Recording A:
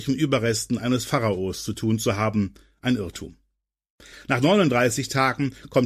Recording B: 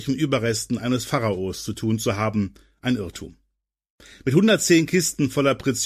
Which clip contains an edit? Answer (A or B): A